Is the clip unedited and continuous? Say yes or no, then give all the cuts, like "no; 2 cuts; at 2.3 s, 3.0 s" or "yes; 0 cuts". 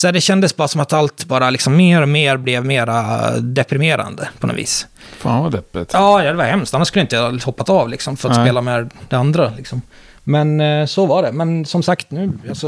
yes; 0 cuts